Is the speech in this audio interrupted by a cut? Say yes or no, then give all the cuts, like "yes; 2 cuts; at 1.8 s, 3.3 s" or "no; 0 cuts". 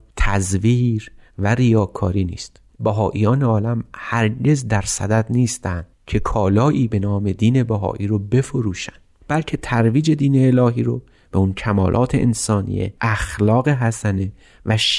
yes; 1 cut; at 13.0 s